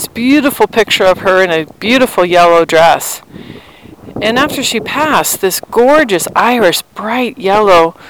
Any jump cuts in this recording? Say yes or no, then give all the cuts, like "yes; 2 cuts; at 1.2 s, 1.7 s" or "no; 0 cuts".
no; 0 cuts